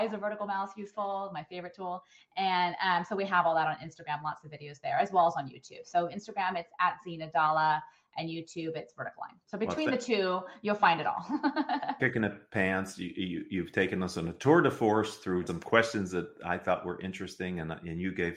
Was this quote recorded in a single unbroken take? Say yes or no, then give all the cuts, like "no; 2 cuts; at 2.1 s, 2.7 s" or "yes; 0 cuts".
no; 3 cuts; at 9.4 s, 12.0 s, 15.5 s